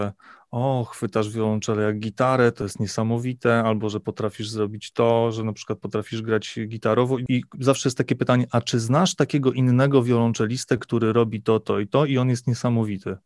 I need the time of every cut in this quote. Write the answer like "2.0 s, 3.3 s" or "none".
none